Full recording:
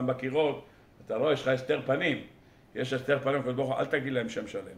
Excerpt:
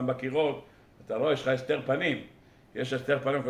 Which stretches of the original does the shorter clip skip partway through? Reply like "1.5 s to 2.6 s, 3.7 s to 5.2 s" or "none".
none